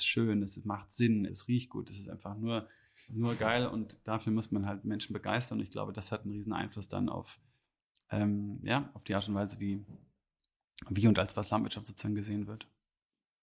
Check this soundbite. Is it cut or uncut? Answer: cut